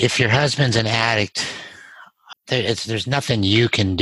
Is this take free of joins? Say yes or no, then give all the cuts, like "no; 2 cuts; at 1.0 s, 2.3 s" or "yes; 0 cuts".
no; 1 cut; at 2.3 s